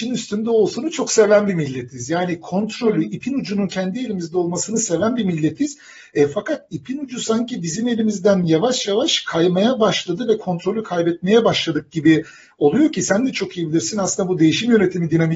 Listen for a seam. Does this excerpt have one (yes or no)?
no